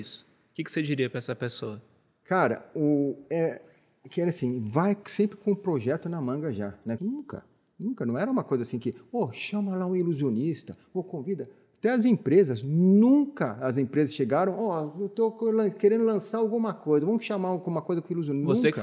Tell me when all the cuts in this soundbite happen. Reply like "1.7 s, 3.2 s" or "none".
7.0 s

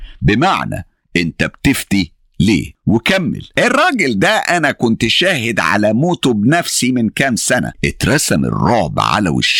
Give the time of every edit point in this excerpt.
none

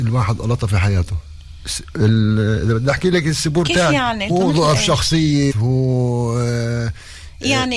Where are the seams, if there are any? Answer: 4.3 s, 5.5 s

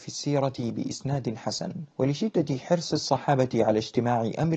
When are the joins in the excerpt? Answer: 1.9 s

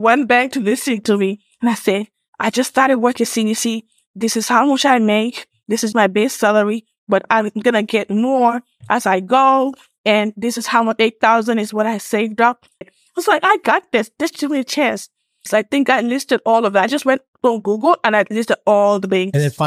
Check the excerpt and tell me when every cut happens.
5.9 s, 12.8 s, 15.5 s

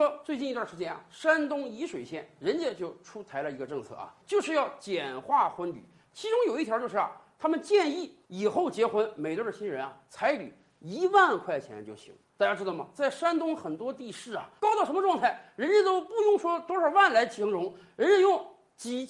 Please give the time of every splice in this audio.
14.6 s

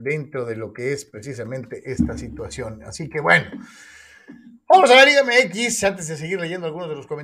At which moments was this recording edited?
none

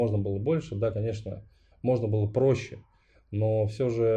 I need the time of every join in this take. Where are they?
none

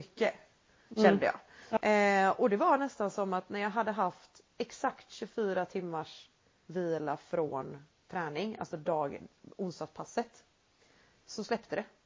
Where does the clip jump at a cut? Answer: 1.8 s

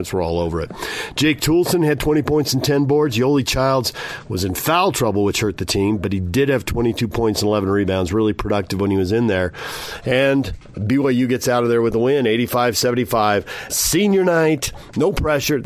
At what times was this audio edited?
13.7 s

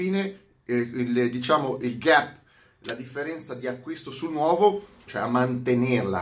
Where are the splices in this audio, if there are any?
5.1 s

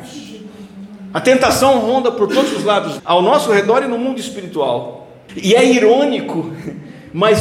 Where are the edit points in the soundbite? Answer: 3.0 s, 5.3 s

